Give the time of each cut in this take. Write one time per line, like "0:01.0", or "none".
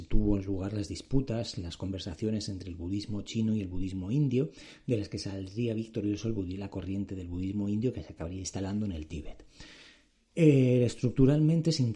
none